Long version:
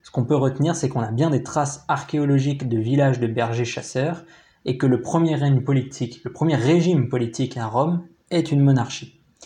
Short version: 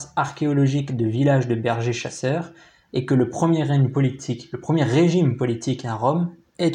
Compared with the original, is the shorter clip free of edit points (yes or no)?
yes